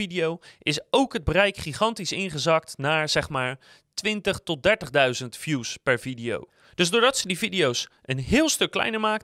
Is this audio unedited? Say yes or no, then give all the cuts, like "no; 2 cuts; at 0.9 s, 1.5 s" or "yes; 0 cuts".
yes; 0 cuts